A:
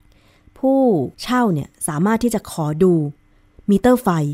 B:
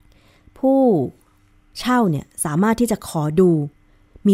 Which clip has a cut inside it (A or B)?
A